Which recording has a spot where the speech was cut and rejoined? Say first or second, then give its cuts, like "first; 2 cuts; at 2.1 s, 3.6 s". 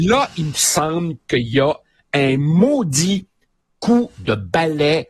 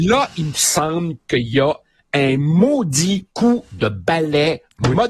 second; 1 cut; at 3.3 s